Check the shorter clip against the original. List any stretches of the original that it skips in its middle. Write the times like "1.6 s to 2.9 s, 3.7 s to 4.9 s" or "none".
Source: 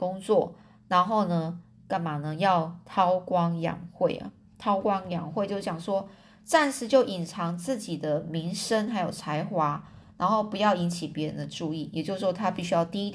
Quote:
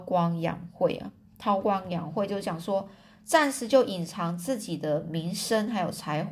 none